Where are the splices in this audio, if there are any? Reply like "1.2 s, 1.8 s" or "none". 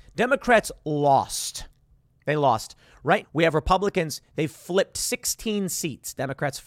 3.2 s